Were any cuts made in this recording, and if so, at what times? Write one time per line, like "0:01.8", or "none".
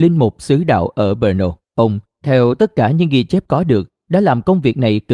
0:01.6